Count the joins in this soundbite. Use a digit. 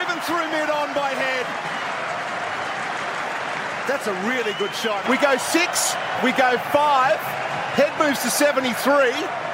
1